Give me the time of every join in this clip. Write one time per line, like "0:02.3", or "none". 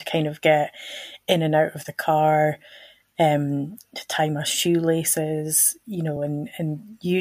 none